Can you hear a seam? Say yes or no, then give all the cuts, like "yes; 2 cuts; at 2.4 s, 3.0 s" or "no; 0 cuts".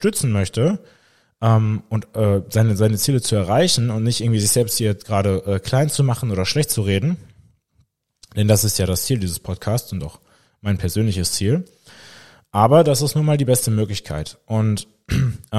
no; 0 cuts